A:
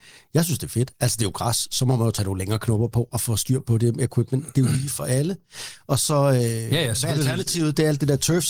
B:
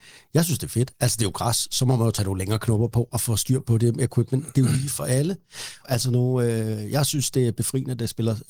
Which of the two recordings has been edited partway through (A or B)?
B